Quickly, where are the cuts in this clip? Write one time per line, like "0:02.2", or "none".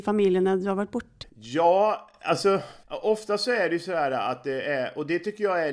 0:01.2